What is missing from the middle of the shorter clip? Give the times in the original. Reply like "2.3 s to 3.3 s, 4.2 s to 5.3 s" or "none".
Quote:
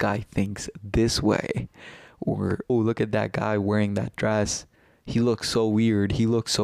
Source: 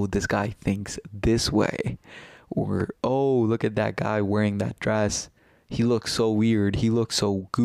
3.0 s to 3.3 s